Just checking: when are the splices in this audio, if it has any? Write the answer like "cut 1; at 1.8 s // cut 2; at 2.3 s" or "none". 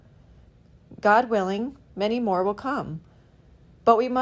none